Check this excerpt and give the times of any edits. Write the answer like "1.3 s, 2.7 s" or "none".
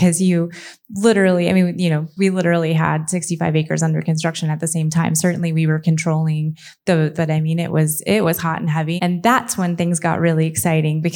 7.1 s, 9.0 s